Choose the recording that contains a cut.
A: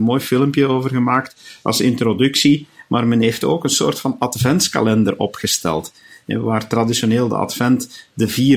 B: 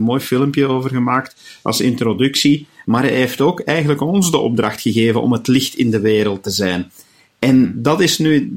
B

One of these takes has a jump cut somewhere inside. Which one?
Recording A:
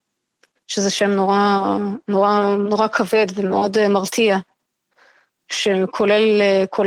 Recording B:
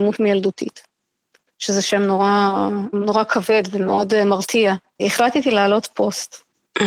B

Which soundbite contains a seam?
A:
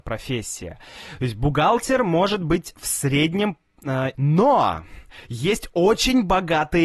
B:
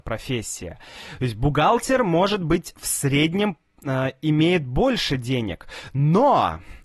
A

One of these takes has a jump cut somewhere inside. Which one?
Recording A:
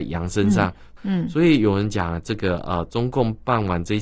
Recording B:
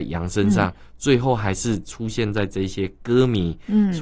A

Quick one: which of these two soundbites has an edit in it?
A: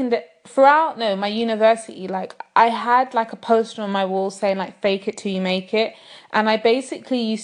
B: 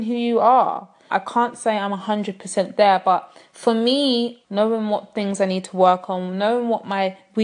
B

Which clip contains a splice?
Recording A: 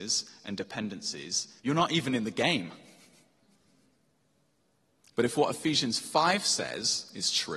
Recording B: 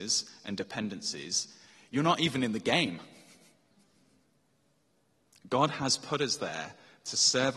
A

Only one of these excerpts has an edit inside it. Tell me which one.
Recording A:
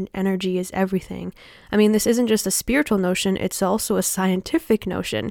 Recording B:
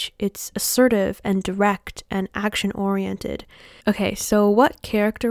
B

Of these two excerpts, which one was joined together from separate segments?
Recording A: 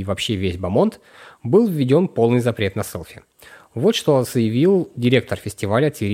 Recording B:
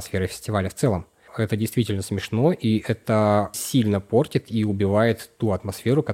B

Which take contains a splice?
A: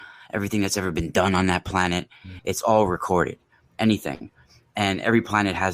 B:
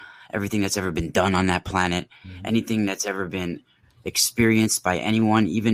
A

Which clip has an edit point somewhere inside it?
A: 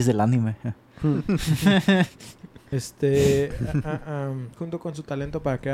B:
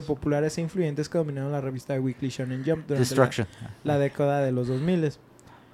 A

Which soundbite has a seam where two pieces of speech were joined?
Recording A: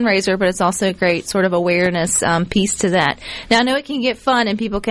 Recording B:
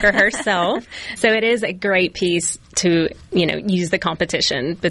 B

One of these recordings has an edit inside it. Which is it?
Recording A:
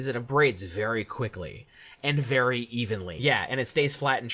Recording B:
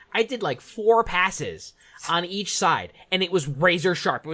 A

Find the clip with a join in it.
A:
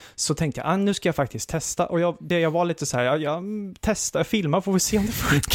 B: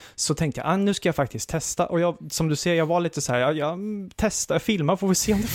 A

